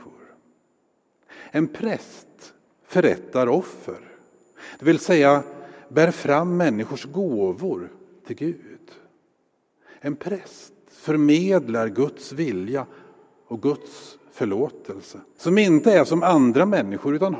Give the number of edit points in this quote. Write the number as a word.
one